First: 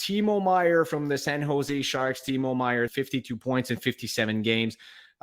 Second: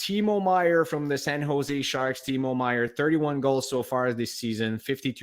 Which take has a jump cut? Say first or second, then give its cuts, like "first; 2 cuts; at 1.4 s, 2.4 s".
first; 1 cut; at 2.9 s